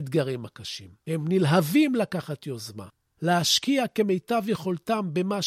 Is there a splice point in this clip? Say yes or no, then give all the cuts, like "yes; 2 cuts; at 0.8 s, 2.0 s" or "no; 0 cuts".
no; 0 cuts